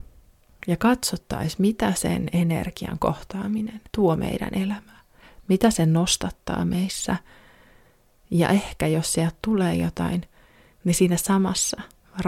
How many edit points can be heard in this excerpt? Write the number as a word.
one